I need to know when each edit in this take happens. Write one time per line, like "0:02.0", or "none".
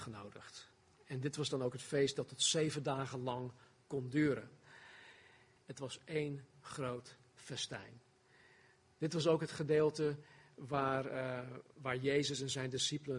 0:05.6